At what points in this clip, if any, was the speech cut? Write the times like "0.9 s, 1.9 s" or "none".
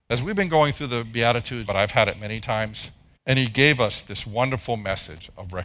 1.7 s, 3.2 s